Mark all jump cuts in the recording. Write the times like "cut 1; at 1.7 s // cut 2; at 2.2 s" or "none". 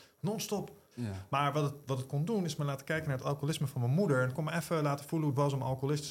cut 1; at 0.9 s

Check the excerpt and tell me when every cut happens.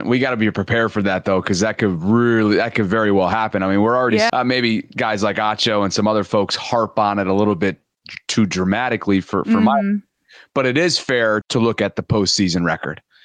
cut 1; at 4.3 s // cut 2; at 11.4 s

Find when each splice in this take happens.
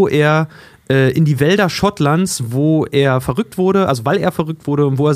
none

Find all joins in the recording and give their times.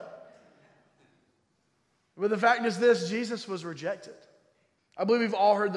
cut 1; at 4.8 s

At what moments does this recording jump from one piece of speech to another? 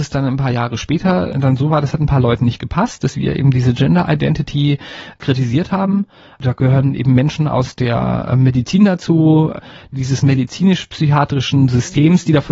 none

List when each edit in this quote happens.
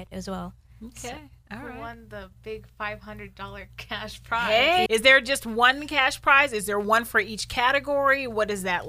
cut 1; at 4.9 s

